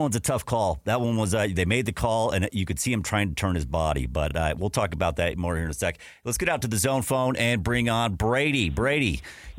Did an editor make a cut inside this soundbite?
no; 0 cuts

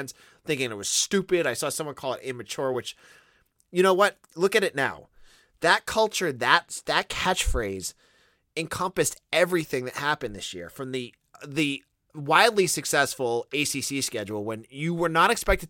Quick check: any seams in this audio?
no; 0 cuts

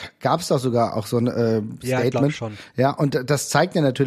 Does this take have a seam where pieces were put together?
no; 0 cuts

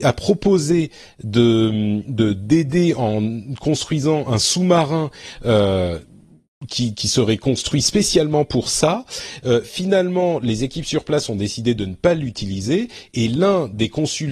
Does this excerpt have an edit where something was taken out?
no; 0 cuts

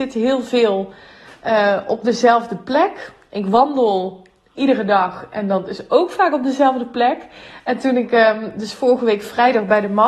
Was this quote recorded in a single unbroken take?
yes; 0 cuts

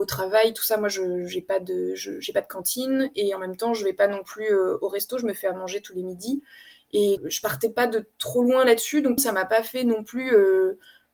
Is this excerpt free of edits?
no; 2 cuts; at 7.2 s, 9.2 s

